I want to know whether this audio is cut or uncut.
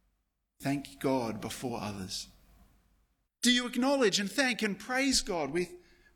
cut